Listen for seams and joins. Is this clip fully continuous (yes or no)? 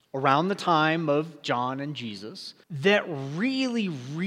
no